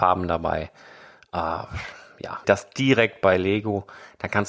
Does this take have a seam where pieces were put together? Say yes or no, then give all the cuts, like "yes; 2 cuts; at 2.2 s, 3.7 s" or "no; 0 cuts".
yes; 1 cut; at 2.4 s